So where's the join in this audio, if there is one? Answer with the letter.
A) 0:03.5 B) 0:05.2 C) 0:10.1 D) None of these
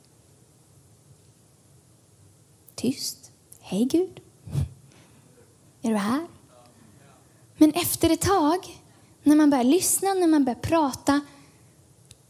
D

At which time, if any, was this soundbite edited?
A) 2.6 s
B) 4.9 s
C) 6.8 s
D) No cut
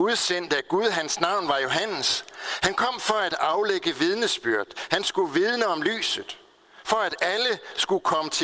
D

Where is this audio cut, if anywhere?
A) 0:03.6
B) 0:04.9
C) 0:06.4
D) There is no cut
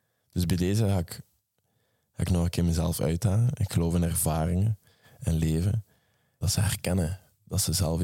C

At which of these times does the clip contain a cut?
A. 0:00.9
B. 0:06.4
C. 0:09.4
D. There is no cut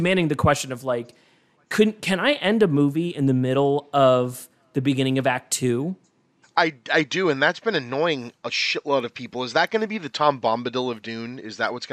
B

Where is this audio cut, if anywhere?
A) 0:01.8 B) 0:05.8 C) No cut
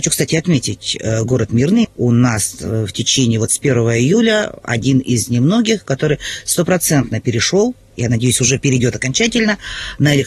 A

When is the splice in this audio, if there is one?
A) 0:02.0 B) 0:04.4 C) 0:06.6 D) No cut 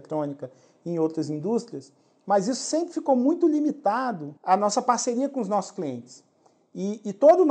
B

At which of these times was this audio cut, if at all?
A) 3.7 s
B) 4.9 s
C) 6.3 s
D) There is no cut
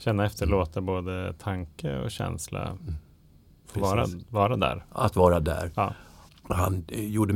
C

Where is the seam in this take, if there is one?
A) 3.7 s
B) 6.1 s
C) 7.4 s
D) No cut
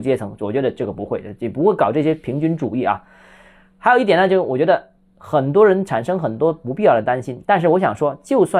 D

